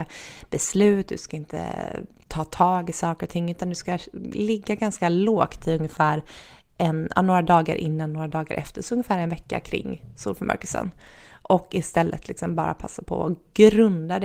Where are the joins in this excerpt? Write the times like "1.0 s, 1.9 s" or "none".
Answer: none